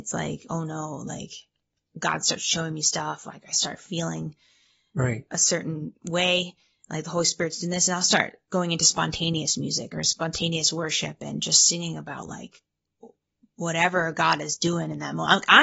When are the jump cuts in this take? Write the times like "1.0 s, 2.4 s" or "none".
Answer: none